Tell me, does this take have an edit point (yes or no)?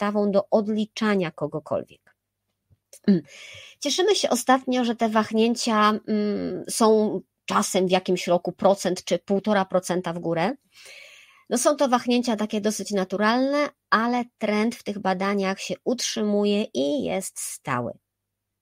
no